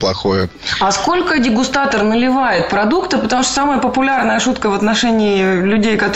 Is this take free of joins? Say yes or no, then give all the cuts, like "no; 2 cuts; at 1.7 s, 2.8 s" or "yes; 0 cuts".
yes; 0 cuts